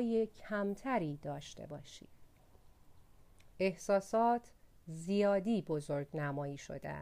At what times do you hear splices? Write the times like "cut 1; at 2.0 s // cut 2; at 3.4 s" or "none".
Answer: cut 1; at 3.5 s